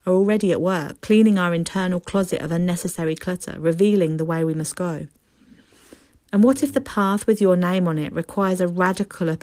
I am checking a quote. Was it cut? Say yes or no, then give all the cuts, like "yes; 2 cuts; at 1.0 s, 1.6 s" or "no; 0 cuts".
yes; 1 cut; at 1.0 s